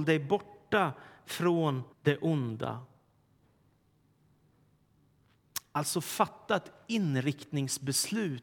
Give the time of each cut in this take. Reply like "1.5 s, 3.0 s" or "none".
1.9 s